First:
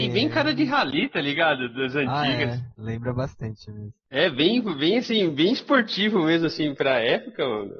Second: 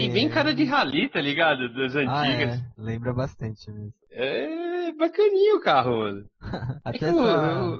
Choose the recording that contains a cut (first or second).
second